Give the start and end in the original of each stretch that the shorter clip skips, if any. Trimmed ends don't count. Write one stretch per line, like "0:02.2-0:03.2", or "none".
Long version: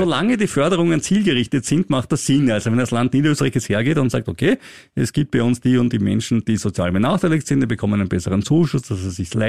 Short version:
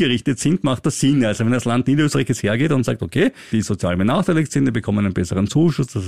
0:04.8-0:06.4